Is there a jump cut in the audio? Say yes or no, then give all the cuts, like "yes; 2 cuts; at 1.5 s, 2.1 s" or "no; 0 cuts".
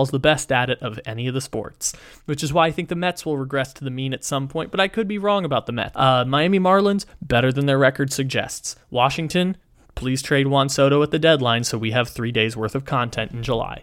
yes; 1 cut; at 5.9 s